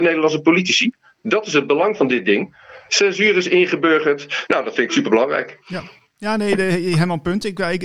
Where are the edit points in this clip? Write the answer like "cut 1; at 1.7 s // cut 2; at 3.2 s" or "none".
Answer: cut 1; at 2.9 s // cut 2; at 4.5 s